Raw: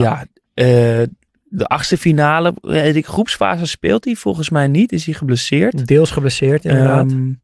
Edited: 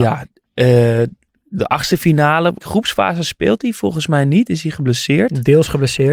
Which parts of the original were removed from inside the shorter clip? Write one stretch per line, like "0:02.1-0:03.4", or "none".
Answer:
0:02.6-0:03.0

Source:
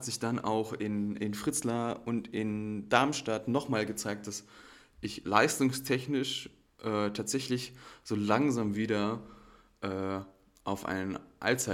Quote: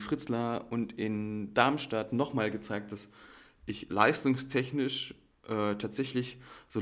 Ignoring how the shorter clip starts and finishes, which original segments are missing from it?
none

